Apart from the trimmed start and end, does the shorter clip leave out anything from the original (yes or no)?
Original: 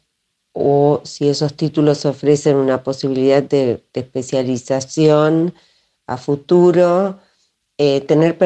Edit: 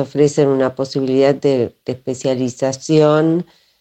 no